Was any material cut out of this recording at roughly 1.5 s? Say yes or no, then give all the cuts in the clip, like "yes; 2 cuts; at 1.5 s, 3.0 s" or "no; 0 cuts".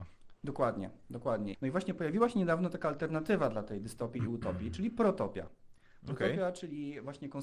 yes; 1 cut; at 1.5 s